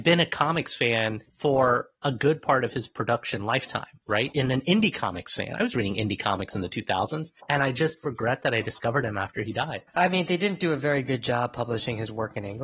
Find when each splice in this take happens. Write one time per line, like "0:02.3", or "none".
none